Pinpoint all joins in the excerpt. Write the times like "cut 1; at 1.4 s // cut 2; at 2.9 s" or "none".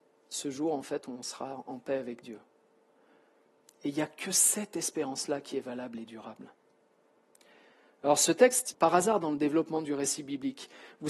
cut 1; at 8.7 s